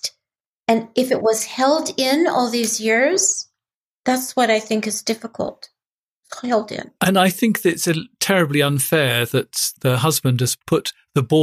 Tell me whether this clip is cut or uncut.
cut